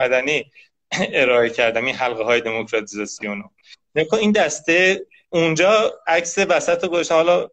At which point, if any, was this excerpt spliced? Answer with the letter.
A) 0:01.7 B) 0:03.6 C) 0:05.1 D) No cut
D